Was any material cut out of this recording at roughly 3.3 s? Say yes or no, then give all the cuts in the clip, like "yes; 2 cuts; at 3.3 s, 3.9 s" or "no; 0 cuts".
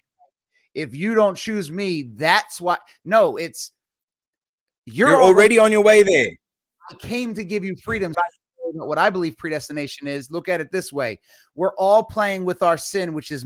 no; 1 cut; at 8.1 s